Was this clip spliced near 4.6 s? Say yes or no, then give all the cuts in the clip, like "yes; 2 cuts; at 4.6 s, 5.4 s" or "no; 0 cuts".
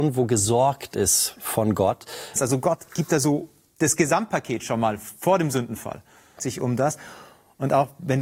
no; 2 cuts; at 2.4 s, 6.4 s